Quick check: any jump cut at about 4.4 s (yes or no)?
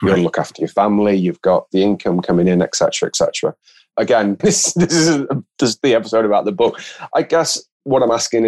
yes